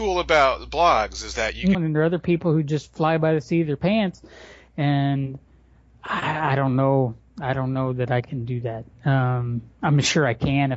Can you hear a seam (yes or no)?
yes